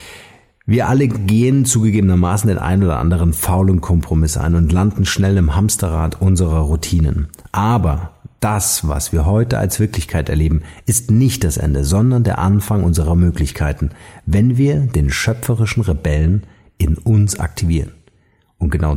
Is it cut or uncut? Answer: uncut